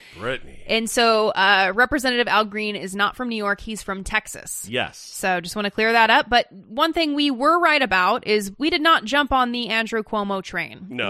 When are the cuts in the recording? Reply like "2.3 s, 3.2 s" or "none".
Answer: none